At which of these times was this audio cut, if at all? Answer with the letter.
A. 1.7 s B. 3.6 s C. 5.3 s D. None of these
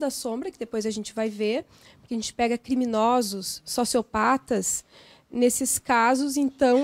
C